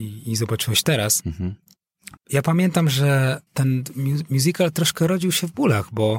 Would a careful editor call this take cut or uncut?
cut